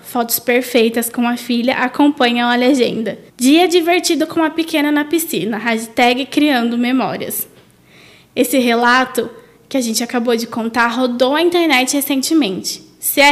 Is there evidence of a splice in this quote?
yes; 1 cut; at 3.3 s

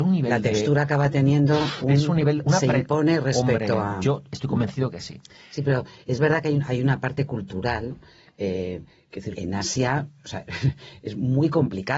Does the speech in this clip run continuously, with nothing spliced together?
no; 1 cut; at 9.3 s

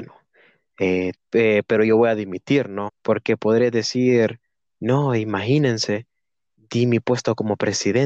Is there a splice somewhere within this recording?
yes; 2 cuts; at 1.1 s, 2.9 s

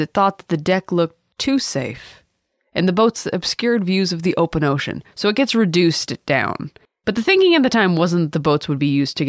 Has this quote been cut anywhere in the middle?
no; 0 cuts

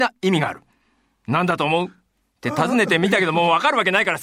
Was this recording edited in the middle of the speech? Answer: no; 0 cuts

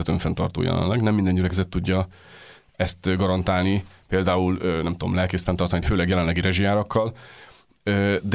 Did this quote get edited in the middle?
yes; 1 cut; at 5.8 s

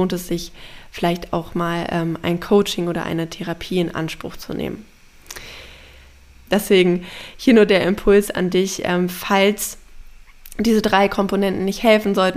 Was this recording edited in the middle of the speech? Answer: yes; 1 cut; at 6.5 s

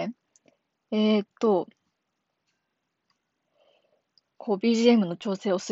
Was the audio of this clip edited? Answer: no; 0 cuts

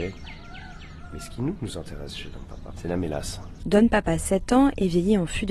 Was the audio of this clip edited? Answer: yes; 1 cut; at 3.6 s

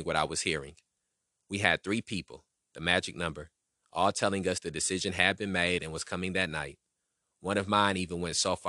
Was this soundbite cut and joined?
no; 0 cuts

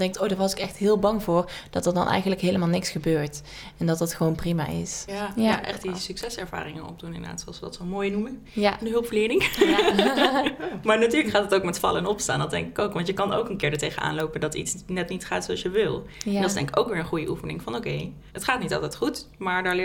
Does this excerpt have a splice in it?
yes; 1 cut; at 5.1 s

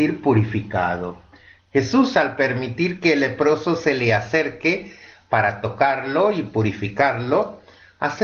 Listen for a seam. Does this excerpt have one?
yes; 1 cut; at 1.6 s

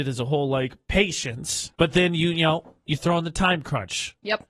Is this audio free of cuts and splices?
no; 2 cuts; at 1.7 s, 2.9 s

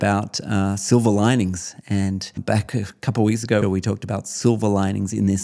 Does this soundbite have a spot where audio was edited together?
yes; 2 cuts; at 2.4 s, 3.6 s

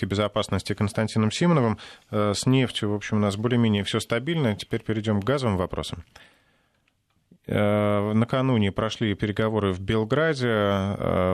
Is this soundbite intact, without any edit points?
yes; 0 cuts

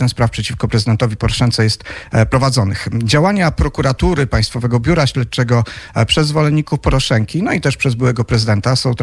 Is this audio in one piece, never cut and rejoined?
yes; 0 cuts

